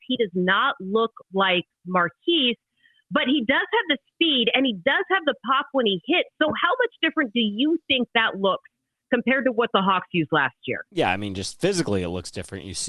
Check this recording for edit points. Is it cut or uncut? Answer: uncut